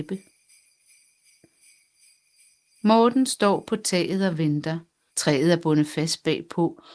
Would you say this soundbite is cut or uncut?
cut